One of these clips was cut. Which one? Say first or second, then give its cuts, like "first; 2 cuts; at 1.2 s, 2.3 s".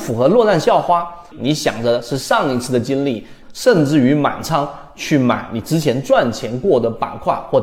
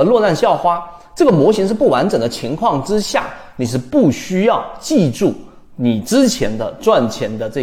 first; 2 cuts; at 1.3 s, 3.4 s